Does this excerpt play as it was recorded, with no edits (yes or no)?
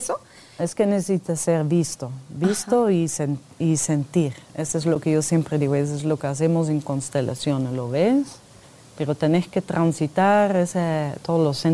yes